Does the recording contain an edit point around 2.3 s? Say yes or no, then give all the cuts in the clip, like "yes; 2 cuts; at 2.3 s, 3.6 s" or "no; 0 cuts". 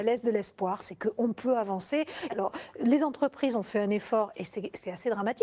yes; 1 cut; at 2.3 s